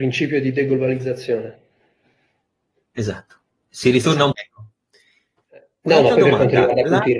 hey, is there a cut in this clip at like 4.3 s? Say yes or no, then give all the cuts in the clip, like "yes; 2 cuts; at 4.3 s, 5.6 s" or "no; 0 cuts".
yes; 1 cut; at 4.3 s